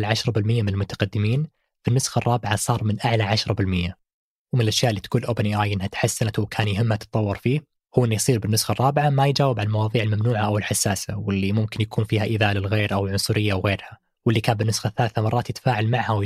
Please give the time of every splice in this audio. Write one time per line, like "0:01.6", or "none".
none